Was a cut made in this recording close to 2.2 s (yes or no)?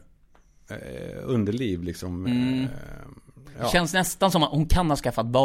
yes